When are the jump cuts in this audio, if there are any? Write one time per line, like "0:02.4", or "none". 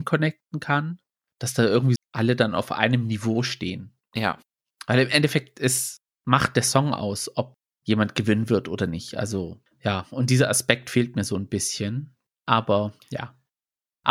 0:02.0
0:09.6